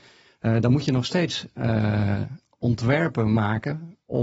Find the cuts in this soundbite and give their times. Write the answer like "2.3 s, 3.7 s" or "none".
none